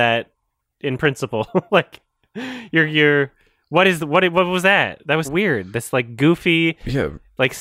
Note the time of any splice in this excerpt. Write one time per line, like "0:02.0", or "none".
0:05.2